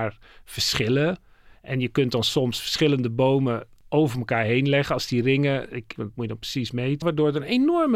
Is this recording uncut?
no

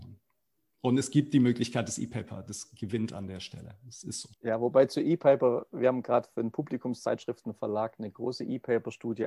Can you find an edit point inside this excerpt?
yes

